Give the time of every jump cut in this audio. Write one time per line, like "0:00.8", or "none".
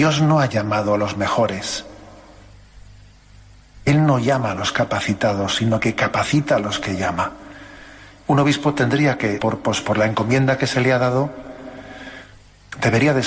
0:08.2
0:09.4